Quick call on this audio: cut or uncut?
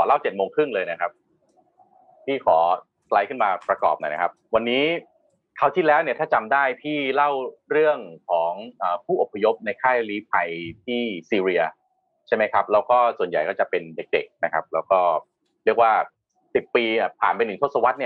uncut